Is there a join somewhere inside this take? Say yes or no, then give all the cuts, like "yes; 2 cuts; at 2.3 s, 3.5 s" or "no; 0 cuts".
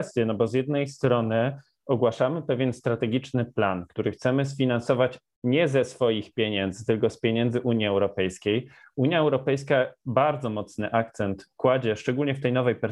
no; 0 cuts